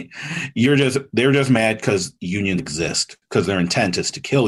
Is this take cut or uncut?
cut